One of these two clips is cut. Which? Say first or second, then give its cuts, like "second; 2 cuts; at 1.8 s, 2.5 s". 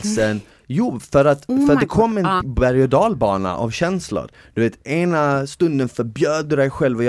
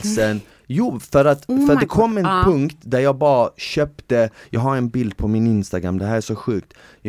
first; 1 cut; at 2.4 s